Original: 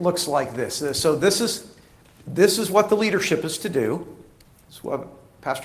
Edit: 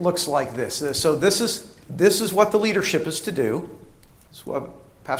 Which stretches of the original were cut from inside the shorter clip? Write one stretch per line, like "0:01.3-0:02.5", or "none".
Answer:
0:01.8-0:02.2